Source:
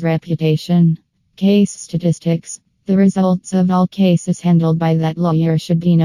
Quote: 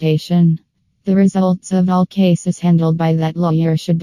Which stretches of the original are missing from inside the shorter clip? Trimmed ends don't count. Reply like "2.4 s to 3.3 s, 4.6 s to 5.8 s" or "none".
1.3 s to 2.7 s